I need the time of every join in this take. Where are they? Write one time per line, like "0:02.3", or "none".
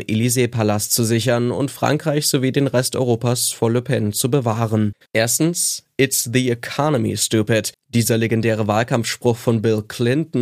0:05.0